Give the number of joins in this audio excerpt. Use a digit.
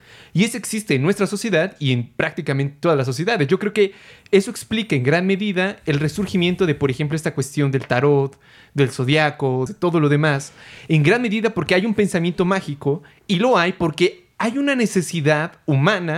1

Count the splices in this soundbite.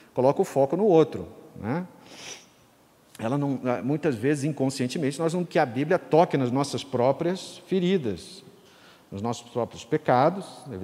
1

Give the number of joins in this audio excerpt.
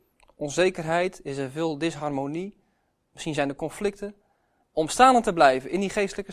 1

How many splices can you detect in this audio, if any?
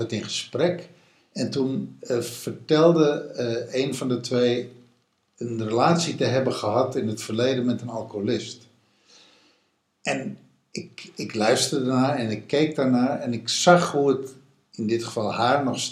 0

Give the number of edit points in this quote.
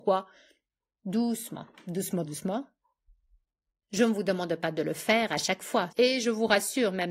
2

